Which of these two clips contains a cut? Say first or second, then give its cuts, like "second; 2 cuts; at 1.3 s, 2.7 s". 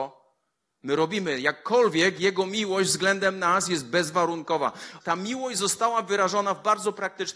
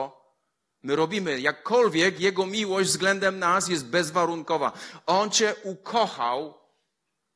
first; 1 cut; at 5.0 s